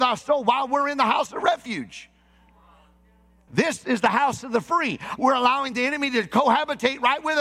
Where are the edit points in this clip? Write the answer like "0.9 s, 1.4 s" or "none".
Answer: 3.5 s, 5.2 s